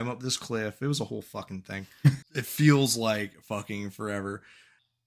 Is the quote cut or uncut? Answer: cut